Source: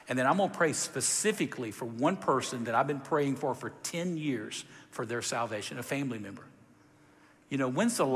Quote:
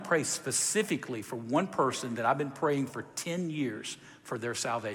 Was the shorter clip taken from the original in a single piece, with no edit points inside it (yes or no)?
no